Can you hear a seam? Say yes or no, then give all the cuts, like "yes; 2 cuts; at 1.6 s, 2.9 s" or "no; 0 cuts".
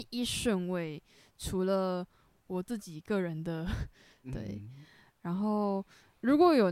yes; 1 cut; at 4.2 s